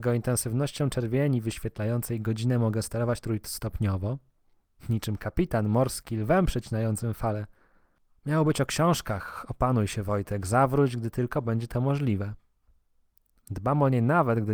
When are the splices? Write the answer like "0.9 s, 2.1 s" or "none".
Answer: 8.2 s, 13.4 s